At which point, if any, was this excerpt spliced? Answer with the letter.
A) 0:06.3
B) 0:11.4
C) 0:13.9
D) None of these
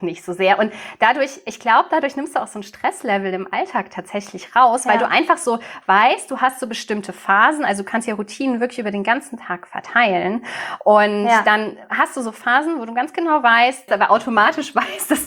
C